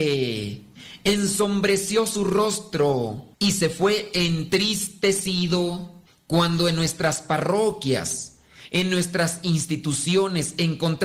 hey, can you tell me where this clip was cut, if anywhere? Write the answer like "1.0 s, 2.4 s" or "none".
3.3 s, 8.7 s